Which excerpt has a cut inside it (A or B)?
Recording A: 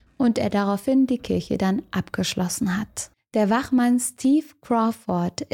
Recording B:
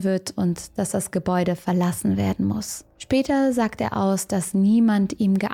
A